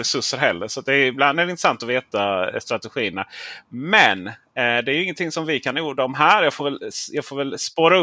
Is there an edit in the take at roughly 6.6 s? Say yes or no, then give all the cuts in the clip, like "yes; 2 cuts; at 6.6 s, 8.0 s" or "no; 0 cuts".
no; 0 cuts